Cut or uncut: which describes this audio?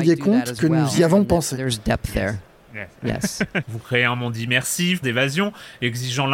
cut